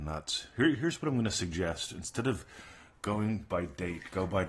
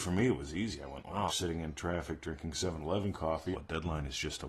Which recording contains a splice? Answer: second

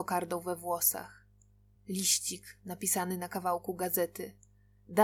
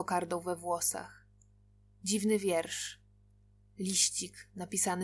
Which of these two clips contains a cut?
first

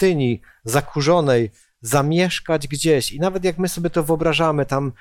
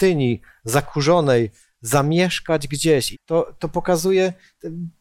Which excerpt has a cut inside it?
second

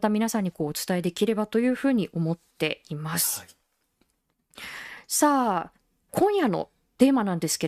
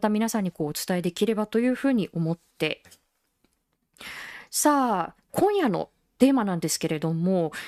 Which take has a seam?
second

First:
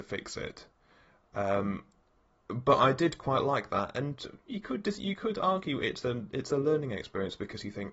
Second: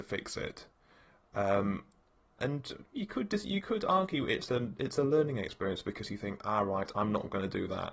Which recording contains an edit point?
second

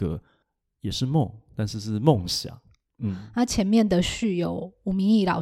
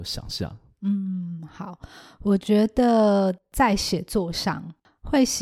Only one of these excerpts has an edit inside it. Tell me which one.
first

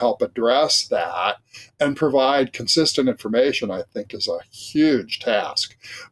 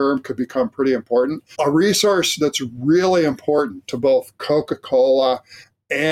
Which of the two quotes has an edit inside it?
second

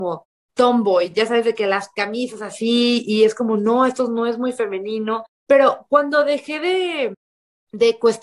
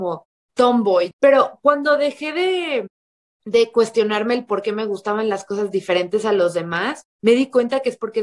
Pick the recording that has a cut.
second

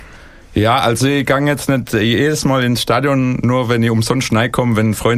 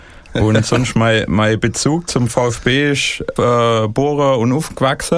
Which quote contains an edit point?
second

